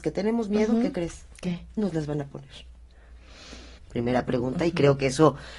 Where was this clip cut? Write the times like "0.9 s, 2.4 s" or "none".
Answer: 3.8 s